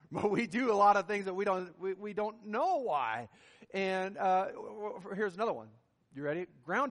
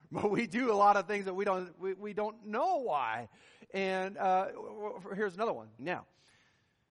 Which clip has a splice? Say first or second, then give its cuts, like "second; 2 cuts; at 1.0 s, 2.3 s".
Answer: second; 1 cut; at 5.8 s